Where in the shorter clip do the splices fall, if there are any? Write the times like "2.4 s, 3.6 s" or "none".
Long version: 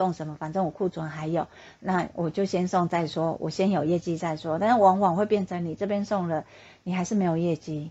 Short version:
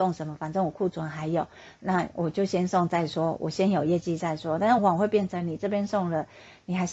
4.8 s